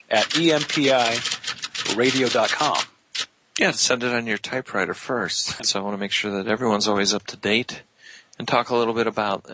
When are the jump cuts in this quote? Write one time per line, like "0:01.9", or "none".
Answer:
0:05.6